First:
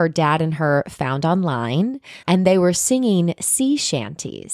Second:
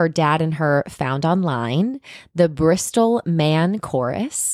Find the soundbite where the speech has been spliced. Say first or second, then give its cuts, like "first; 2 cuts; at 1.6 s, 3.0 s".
first; 1 cut; at 2.2 s